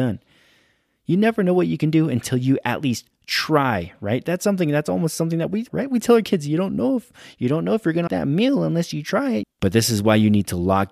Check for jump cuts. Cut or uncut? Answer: cut